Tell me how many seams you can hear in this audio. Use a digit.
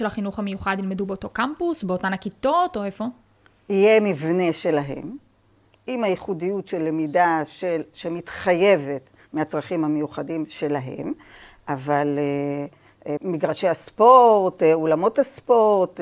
1